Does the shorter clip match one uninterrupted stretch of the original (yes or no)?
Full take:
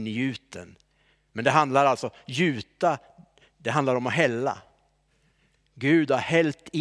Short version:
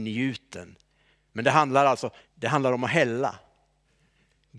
no